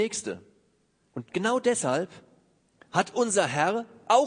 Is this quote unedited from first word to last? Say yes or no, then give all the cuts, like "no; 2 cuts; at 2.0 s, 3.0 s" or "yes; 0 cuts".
no; 1 cut; at 1.0 s